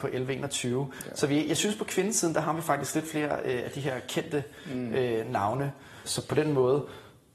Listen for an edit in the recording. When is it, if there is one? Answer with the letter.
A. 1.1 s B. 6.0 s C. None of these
B